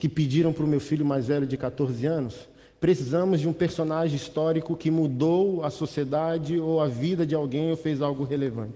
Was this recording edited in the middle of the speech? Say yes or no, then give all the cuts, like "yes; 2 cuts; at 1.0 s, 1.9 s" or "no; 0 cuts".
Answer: no; 0 cuts